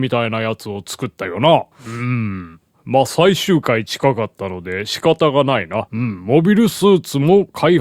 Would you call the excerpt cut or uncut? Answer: cut